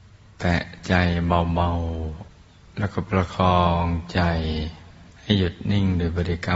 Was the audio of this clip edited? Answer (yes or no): yes